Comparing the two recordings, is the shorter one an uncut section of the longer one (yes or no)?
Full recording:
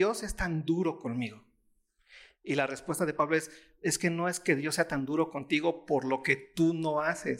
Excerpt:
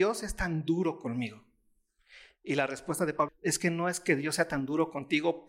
no